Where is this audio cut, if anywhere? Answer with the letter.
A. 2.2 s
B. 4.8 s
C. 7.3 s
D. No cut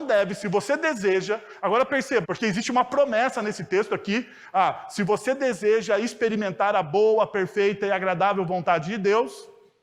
A